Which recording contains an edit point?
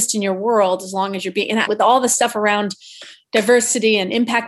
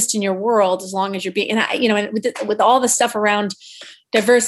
first; 1 cut; at 1.7 s

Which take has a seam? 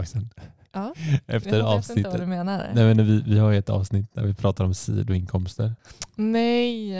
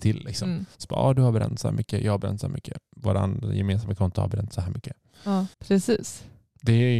second; 1 cut; at 5.5 s

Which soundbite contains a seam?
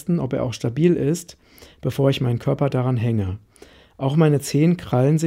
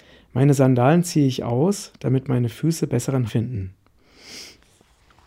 second; 1 cut; at 3.3 s

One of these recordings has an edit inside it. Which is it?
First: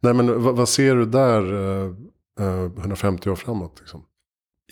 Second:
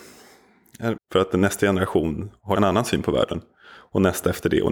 second; 1 cut; at 1.0 s

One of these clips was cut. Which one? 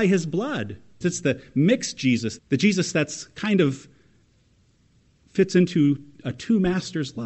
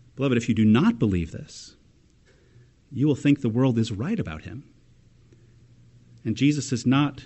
first; 2 cuts; at 1.0 s, 2.4 s

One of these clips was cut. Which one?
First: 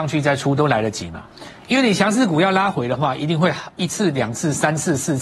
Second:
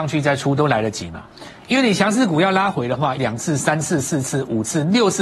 second; 1 cut; at 3.2 s

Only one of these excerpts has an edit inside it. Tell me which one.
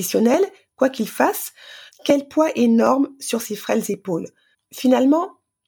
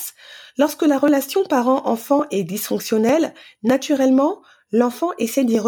first; 2 cuts; at 1.9 s, 4.5 s

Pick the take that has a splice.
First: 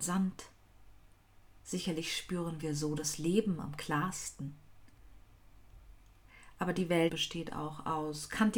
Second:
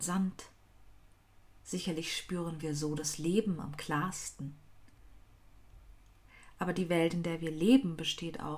first; 1 cut; at 7.1 s

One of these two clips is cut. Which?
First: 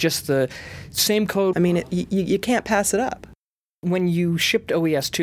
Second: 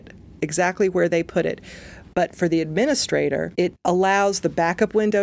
first; 1 cut; at 1.5 s

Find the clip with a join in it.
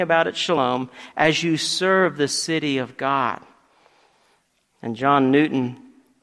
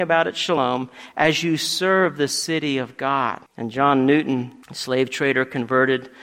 second; 2 cuts; at 3.5 s, 4.6 s

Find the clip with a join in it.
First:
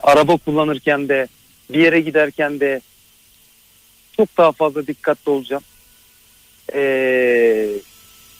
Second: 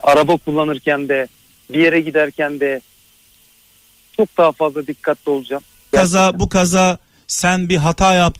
second; 1 cut; at 5.9 s

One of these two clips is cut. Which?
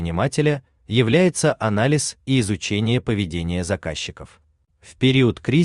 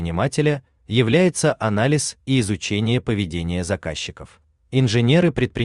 second; 1 cut; at 4.6 s

